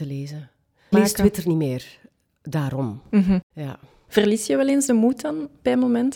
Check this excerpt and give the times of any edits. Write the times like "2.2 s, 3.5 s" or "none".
0.9 s, 3.5 s